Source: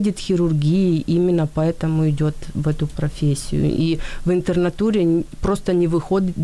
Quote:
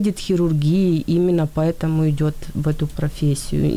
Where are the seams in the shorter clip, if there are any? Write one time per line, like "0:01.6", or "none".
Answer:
none